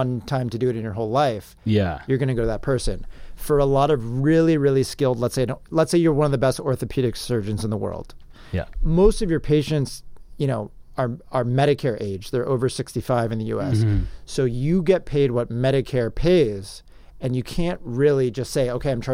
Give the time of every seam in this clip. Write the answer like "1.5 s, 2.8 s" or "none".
8.7 s